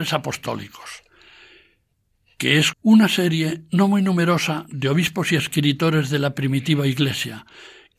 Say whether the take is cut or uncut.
cut